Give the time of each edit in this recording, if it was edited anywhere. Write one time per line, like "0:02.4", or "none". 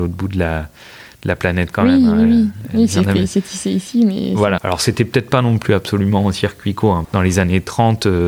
0:04.6
0:07.0